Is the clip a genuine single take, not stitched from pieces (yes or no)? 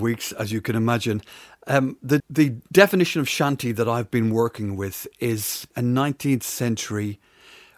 no